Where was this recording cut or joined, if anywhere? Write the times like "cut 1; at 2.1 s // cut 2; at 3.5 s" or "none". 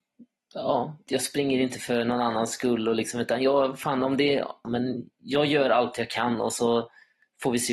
cut 1; at 4.6 s